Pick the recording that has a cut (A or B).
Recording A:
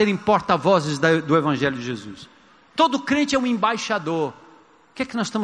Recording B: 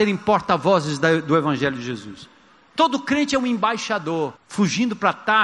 B